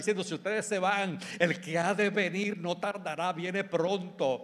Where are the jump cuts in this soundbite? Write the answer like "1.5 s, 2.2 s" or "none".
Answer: none